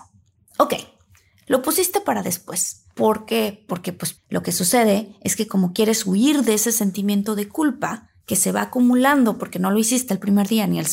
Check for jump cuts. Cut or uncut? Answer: cut